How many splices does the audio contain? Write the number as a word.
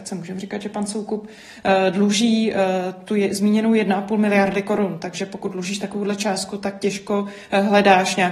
zero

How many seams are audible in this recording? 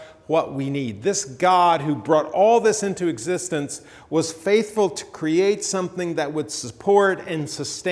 zero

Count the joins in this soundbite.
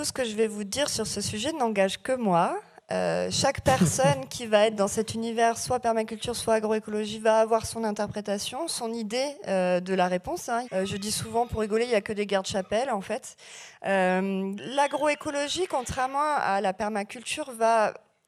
two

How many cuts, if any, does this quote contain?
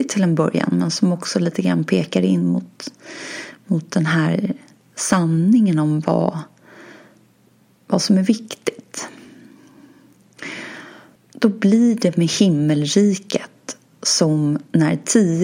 one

